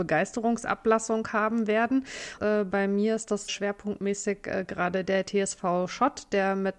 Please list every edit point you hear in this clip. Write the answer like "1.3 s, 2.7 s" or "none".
2.4 s, 3.5 s